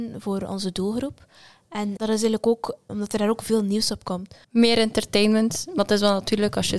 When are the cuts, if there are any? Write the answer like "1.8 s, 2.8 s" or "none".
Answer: 4.4 s